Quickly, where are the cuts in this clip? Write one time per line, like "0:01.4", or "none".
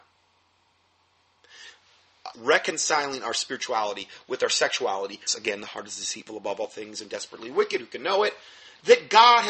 0:02.3
0:05.3

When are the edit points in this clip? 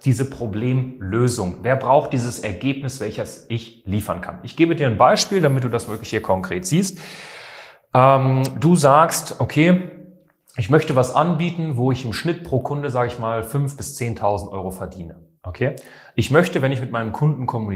none

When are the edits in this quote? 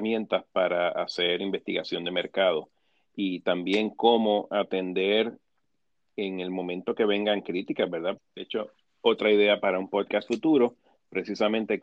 0:08.2

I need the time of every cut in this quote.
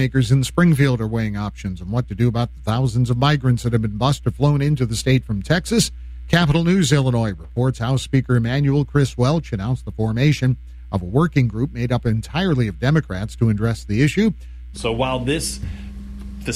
0:14.7

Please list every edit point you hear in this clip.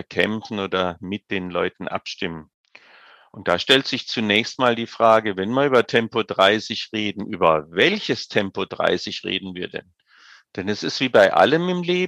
none

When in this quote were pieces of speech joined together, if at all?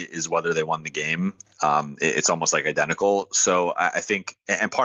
none

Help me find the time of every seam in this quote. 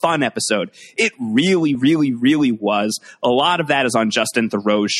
none

